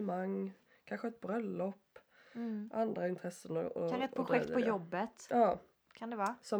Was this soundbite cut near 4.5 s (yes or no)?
no